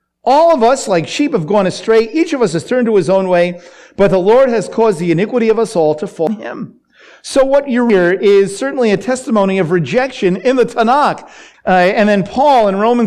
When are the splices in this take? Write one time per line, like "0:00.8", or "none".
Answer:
0:11.5